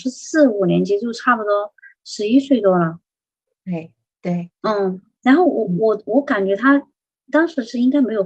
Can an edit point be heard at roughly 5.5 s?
no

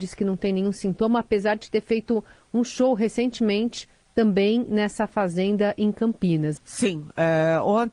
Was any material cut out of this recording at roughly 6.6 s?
yes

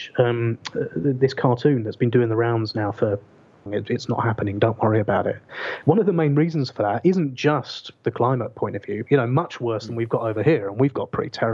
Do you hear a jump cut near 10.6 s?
no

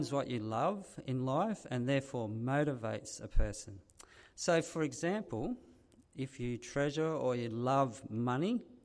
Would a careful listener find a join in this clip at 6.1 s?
no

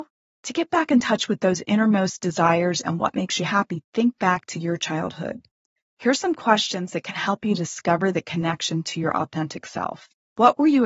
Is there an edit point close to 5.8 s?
no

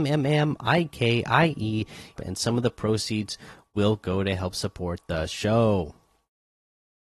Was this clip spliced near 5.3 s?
no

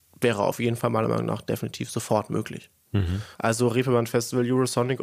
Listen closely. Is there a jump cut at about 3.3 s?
yes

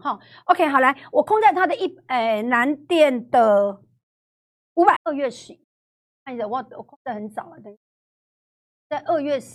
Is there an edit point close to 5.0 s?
yes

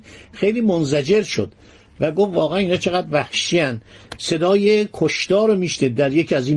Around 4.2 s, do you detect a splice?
yes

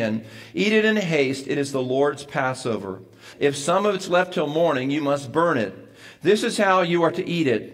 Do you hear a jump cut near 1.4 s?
no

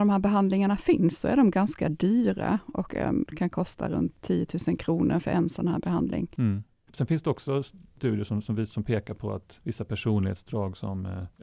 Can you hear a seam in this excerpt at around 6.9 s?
yes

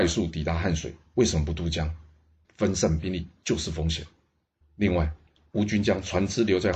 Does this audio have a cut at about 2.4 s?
yes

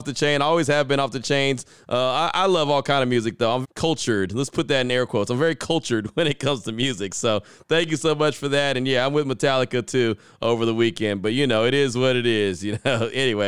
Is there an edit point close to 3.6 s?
yes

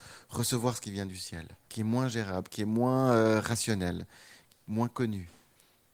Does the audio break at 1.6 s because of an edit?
yes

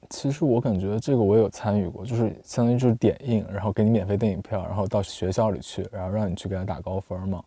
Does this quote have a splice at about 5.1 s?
yes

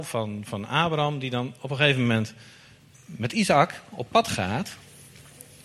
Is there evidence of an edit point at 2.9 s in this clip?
yes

